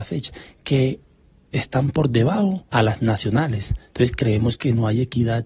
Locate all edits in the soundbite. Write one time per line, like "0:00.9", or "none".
0:02.7